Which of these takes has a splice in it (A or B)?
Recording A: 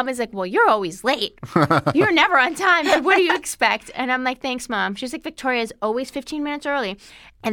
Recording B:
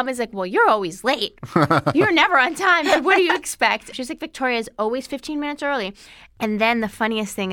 B